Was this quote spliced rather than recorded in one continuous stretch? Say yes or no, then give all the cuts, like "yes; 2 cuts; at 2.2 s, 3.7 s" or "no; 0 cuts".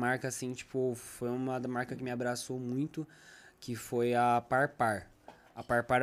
no; 0 cuts